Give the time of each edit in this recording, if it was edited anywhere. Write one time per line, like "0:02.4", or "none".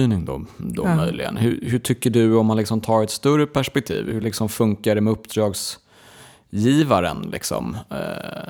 none